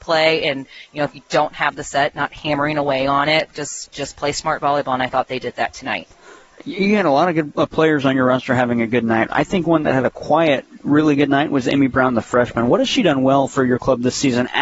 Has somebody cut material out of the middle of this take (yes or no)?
yes